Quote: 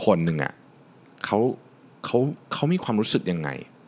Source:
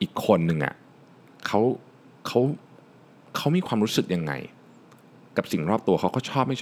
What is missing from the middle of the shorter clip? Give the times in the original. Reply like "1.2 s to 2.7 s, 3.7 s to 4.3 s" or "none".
2.7 s to 3.3 s